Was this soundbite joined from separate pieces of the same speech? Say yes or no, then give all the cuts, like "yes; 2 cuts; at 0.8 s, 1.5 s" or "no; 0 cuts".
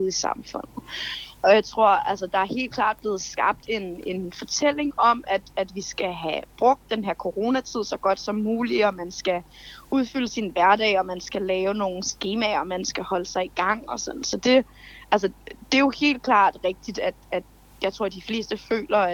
no; 0 cuts